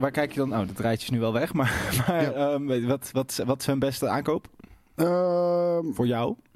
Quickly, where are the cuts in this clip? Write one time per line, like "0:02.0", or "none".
none